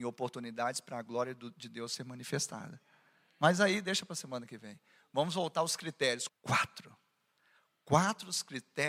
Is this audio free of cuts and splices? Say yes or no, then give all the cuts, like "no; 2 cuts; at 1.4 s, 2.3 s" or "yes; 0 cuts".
no; 1 cut; at 6.3 s